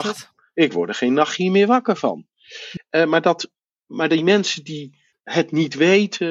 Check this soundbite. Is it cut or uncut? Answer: cut